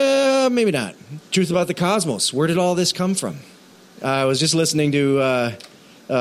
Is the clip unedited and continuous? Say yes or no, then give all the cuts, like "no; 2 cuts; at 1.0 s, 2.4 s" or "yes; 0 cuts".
no; 1 cut; at 1.2 s